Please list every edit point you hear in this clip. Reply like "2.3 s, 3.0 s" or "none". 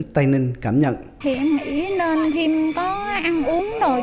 1.2 s

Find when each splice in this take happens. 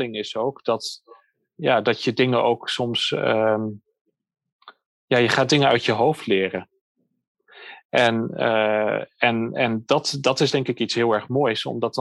none

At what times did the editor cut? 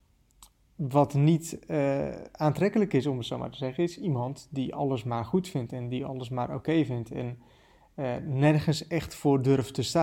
none

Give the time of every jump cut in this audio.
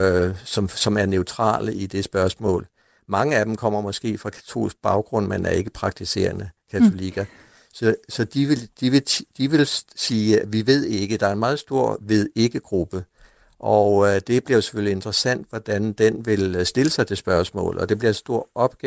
none

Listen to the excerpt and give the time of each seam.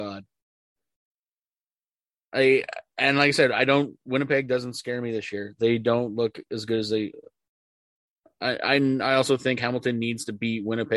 none

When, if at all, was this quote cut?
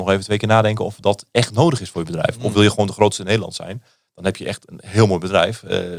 none

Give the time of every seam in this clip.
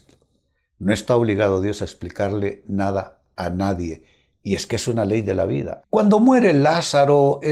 5.8 s

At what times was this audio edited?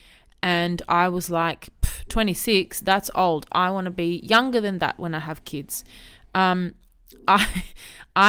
none

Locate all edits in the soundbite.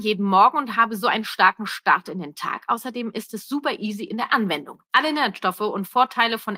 4.9 s

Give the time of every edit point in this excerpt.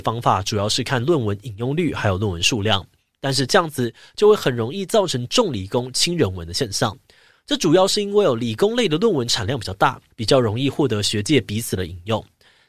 10.1 s

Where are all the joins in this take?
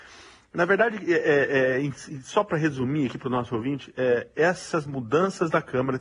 none

